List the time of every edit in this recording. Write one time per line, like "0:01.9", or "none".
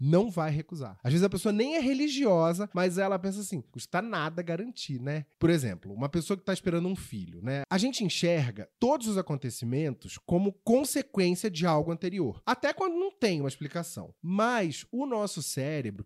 0:05.3
0:07.6
0:14.2